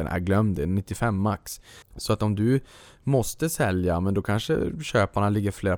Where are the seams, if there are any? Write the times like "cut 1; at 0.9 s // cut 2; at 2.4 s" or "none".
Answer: cut 1; at 1.8 s